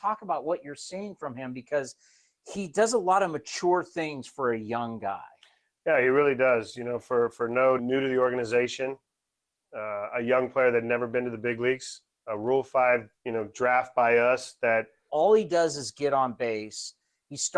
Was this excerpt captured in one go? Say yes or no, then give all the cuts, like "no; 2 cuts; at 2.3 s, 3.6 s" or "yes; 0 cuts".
no; 3 cuts; at 7.8 s, 13.2 s, 15.1 s